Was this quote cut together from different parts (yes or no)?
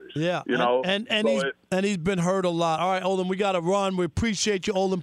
no